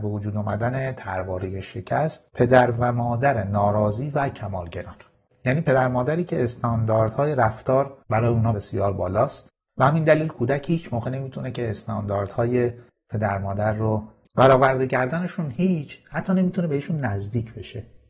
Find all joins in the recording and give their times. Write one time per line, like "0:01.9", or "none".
0:08.5